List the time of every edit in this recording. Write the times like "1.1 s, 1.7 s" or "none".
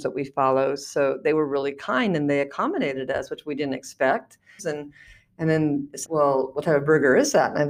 4.6 s, 6.0 s